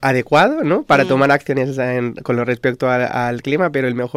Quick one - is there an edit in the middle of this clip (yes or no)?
no